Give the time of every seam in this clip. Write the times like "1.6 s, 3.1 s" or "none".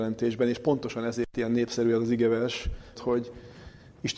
3.0 s